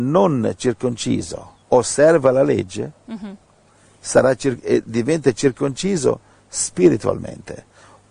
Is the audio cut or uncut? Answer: cut